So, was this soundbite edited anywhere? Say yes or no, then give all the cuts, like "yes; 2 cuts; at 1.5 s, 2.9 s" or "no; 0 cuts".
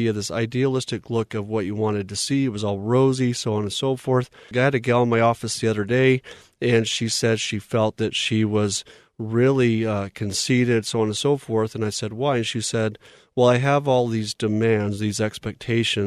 yes; 1 cut; at 4.5 s